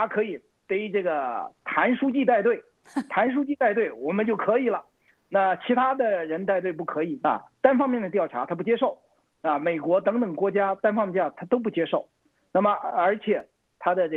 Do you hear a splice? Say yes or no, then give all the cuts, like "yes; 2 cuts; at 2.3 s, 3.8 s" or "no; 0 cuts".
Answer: yes; 1 cut; at 7.2 s